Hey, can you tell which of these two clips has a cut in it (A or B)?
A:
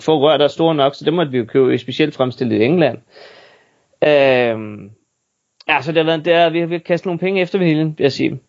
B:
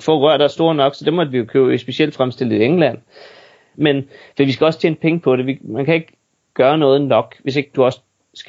B